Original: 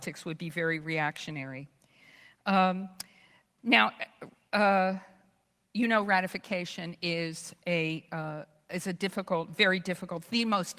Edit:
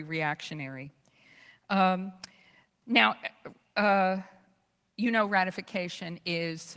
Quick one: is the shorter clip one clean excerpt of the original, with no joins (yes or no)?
yes